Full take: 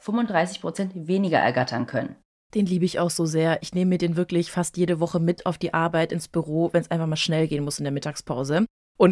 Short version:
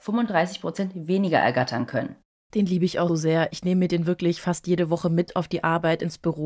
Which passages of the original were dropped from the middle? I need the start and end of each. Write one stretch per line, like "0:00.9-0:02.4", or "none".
0:03.1-0:03.2